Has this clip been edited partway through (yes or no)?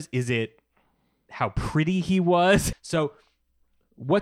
yes